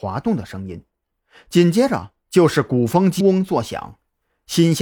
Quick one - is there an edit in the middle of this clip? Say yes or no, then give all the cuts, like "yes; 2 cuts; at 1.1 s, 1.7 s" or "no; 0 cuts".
yes; 1 cut; at 3.2 s